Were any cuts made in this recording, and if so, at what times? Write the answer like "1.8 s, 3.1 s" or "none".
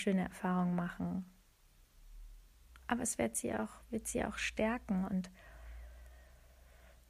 none